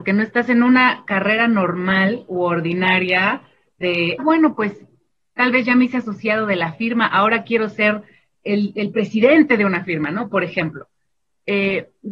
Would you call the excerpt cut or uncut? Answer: cut